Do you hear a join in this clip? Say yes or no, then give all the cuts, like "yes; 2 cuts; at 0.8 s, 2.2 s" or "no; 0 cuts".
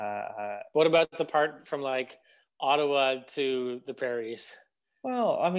no; 0 cuts